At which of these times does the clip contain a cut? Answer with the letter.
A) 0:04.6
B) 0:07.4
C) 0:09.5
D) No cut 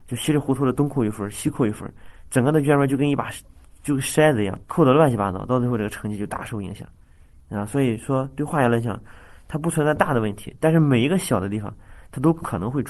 A